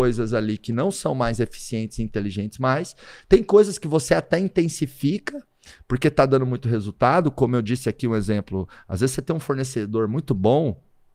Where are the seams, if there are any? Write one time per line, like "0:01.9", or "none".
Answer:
none

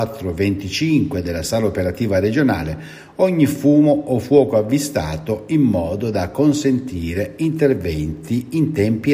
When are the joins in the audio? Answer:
none

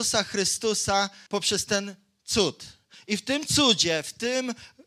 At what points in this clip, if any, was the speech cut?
0:01.3

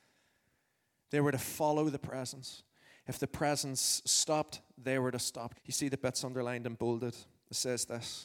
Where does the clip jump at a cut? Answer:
0:05.5

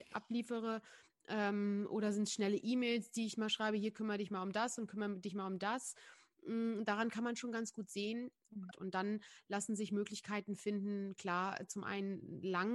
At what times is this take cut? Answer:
0:08.7

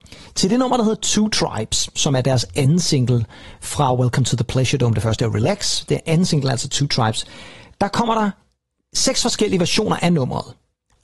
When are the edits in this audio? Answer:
none

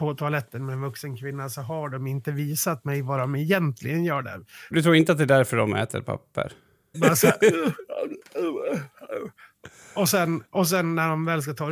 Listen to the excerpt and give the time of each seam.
0:04.7
0:06.9

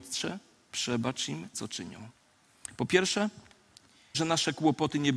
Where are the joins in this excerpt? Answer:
0:01.5
0:04.1

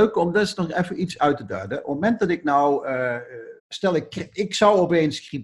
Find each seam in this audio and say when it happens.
0:03.6

